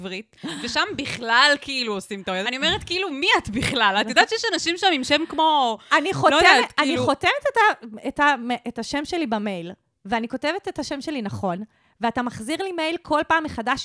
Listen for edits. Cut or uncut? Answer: cut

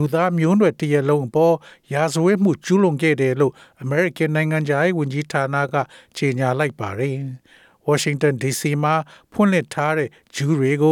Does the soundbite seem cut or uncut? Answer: uncut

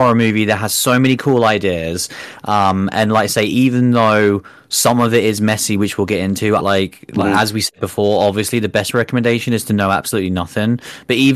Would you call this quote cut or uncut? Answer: cut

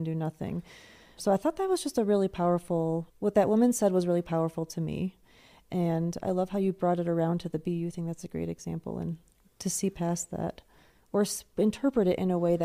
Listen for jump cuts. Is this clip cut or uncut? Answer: uncut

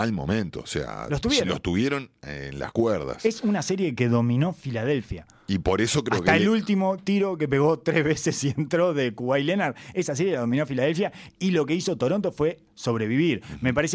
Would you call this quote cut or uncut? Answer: uncut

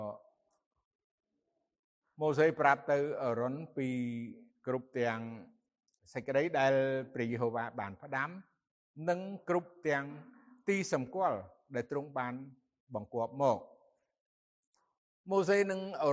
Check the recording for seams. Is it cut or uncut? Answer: uncut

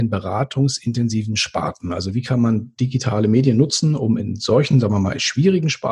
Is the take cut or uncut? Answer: uncut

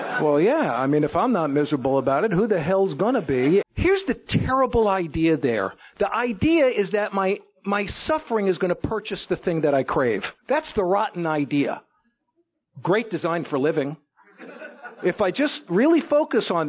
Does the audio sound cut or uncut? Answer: cut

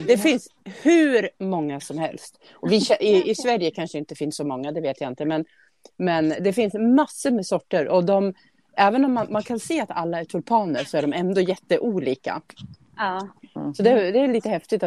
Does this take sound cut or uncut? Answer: uncut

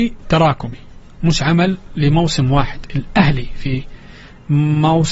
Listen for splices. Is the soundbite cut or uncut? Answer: uncut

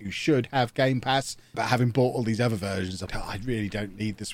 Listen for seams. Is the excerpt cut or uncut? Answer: cut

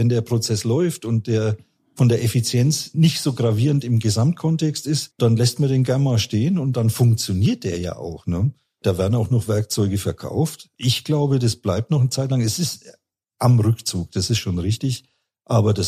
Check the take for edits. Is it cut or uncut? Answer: uncut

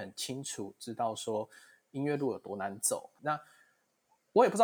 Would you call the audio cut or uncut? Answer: cut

